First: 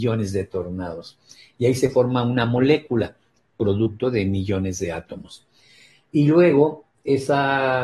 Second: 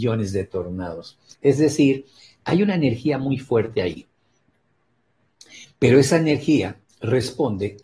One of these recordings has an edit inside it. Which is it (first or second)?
second